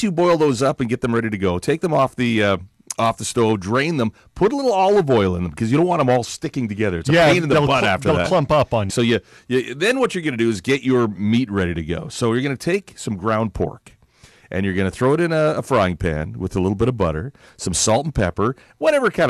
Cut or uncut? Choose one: cut